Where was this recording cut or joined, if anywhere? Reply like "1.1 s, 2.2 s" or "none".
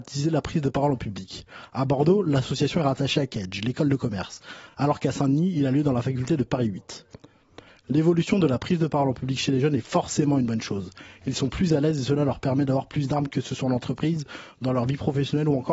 none